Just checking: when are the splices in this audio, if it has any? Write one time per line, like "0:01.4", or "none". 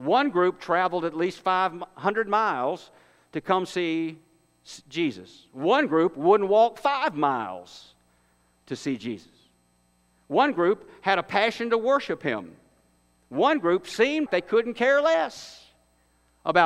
0:14.3